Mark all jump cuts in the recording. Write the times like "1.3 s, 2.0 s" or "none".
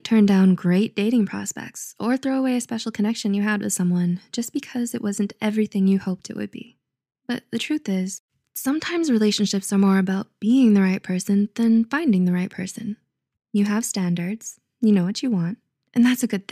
13.4 s